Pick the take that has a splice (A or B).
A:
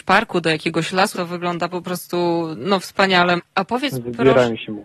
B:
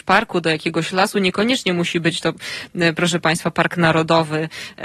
A